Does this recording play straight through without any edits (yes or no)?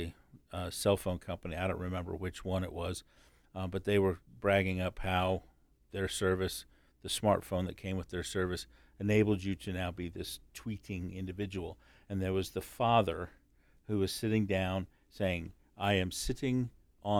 yes